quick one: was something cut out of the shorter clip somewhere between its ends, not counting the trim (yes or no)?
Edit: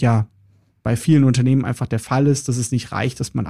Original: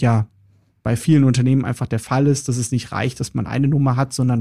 no